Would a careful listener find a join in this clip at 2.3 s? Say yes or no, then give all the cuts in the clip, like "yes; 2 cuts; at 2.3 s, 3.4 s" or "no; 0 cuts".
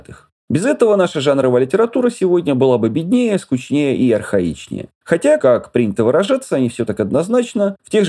no; 1 cut; at 5.4 s